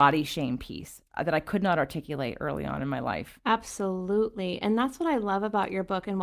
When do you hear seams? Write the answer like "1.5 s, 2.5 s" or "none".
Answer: 3.4 s